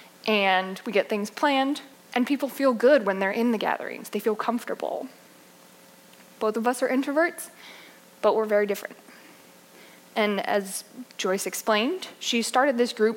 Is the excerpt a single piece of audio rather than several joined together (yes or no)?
no